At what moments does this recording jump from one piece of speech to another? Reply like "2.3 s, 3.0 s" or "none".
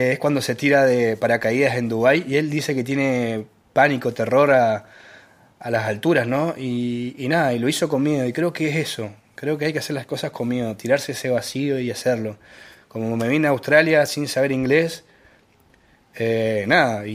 none